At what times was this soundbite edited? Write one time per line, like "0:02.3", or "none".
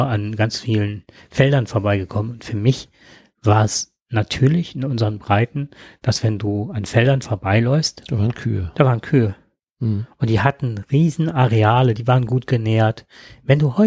none